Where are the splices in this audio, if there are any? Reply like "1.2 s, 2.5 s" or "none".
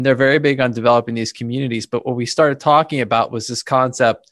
none